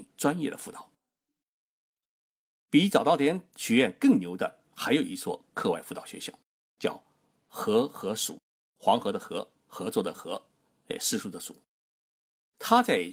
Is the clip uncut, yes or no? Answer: yes